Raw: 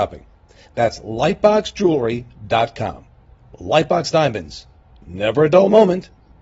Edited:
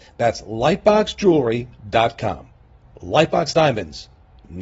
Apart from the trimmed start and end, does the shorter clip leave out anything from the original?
no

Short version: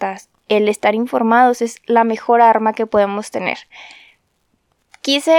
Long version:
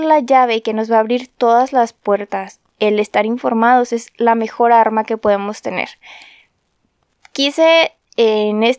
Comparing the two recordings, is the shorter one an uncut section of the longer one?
yes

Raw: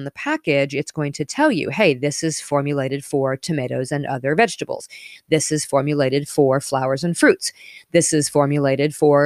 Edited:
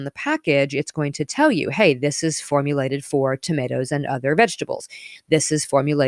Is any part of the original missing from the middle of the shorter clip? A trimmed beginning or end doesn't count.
no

